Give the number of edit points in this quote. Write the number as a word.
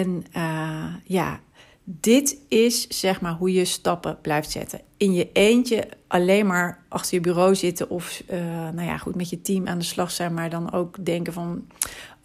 zero